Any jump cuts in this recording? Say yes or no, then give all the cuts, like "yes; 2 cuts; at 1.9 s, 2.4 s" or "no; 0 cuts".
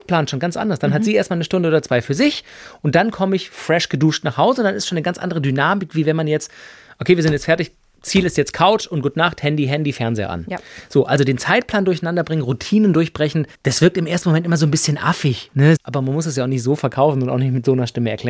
yes; 2 cuts; at 13.5 s, 15.8 s